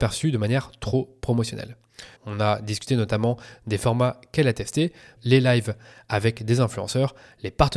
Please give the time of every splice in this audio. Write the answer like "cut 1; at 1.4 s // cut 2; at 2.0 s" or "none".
cut 1; at 2.2 s // cut 2; at 5.2 s